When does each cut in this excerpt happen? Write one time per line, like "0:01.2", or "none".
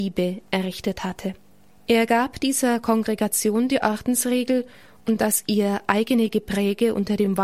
0:01.7